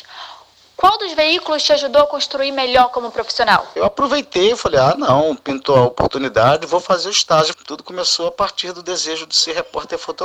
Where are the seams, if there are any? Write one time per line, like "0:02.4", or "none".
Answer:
0:03.8
0:07.5

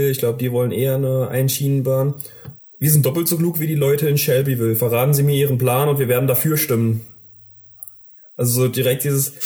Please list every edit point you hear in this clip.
0:02.6

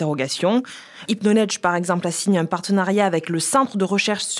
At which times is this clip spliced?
0:01.1

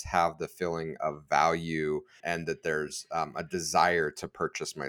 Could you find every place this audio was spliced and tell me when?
0:02.2

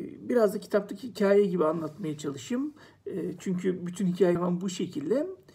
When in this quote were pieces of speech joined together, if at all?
0:04.3

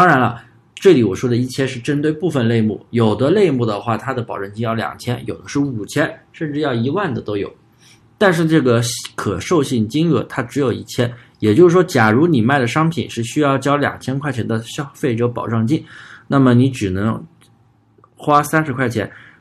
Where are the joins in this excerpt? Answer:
none

